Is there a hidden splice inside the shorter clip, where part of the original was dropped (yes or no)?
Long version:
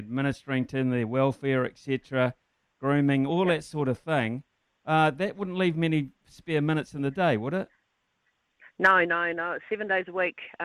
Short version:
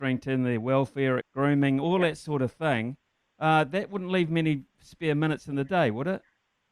yes